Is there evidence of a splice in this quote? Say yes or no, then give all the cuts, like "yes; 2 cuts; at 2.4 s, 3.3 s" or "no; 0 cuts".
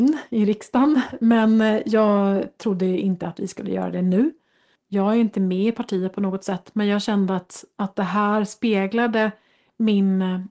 yes; 1 cut; at 4.8 s